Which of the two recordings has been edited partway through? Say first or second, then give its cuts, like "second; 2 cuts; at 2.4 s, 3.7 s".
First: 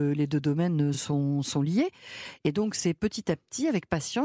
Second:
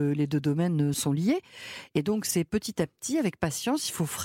second; 1 cut; at 0.9 s